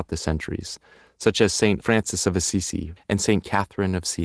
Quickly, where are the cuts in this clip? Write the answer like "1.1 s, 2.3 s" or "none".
1.8 s, 3.0 s